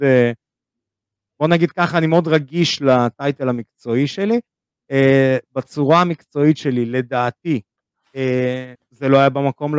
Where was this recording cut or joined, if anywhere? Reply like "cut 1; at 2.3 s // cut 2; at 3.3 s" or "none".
cut 1; at 8.7 s